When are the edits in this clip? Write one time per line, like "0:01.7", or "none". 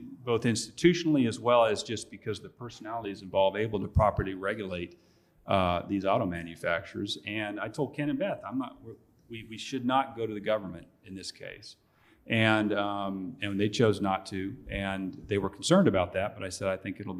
none